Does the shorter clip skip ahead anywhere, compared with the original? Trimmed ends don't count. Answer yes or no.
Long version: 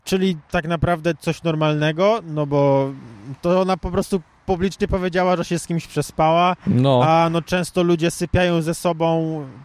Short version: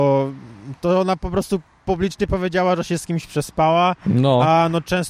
no